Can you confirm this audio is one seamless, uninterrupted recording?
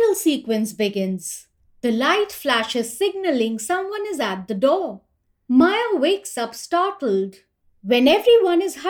no; 1 cut; at 7.7 s

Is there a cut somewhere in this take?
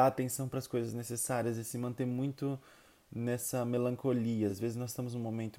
no; 0 cuts

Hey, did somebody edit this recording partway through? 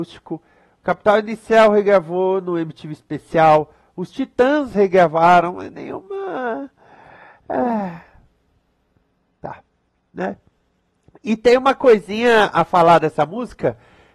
no; 0 cuts

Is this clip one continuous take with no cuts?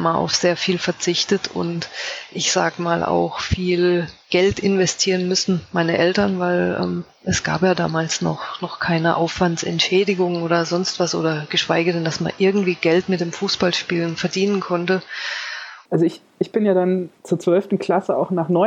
no; 2 cuts; at 15.9 s, 17.2 s

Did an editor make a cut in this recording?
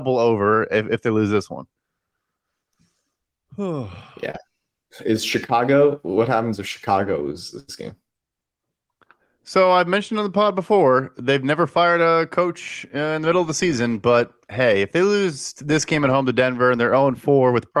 no; 0 cuts

